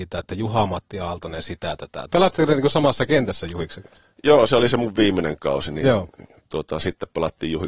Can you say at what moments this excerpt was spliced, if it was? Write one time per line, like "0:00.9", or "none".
0:02.1